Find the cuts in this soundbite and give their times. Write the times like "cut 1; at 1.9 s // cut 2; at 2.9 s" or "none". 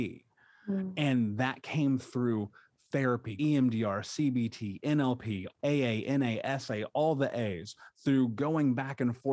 cut 1; at 3.4 s // cut 2; at 5.6 s